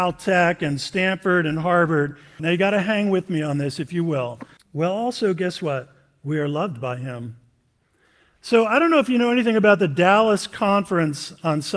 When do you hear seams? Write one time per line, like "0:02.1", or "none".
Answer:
0:02.4
0:04.6